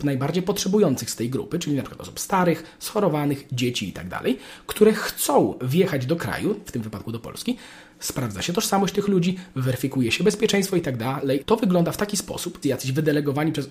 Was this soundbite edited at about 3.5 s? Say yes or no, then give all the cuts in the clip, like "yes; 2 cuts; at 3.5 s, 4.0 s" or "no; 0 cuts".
no; 2 cuts; at 11.4 s, 12.6 s